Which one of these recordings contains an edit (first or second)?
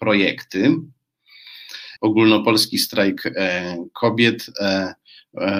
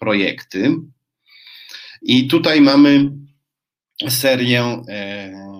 first